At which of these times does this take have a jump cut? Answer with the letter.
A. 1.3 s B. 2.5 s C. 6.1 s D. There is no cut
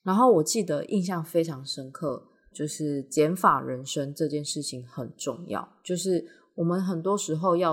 B